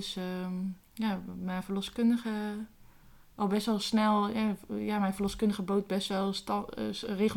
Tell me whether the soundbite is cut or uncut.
uncut